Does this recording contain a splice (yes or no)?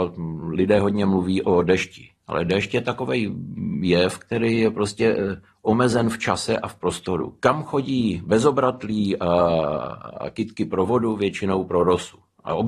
no